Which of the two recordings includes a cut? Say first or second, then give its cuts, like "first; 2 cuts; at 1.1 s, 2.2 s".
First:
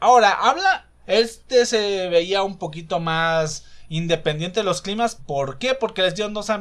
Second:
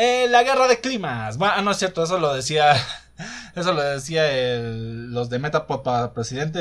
first; 2 cuts; at 1.0 s, 5.2 s